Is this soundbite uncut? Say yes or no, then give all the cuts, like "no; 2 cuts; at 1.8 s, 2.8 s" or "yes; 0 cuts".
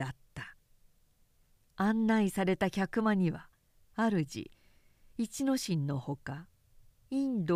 yes; 0 cuts